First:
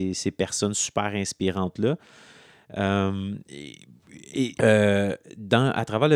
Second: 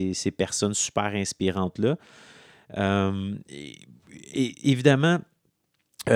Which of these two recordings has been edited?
first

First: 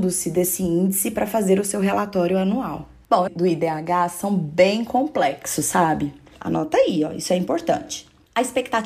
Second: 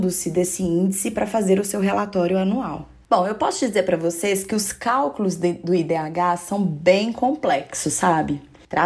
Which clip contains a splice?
first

